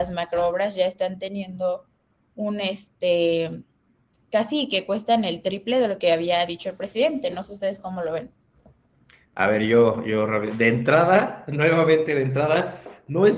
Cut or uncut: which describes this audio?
uncut